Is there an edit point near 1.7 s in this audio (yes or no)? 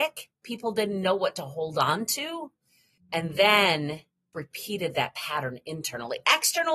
no